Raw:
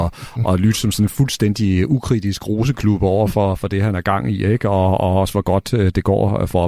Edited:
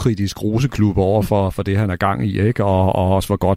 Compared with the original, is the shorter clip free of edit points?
yes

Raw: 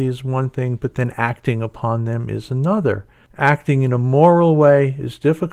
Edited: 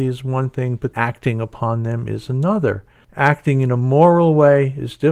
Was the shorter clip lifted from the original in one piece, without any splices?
no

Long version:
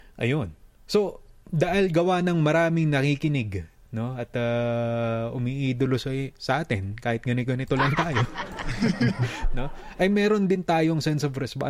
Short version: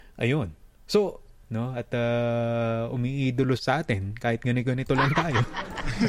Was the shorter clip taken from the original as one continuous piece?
no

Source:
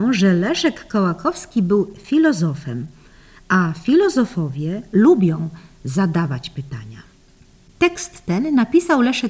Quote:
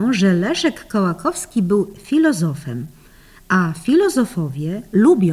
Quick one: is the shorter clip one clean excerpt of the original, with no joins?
yes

